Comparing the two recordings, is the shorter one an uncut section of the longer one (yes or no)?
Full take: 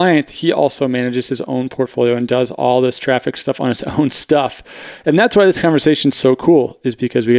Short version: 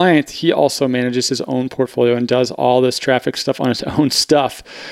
yes